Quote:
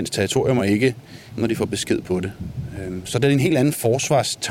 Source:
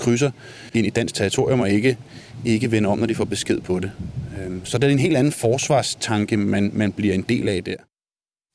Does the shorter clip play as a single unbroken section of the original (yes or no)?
no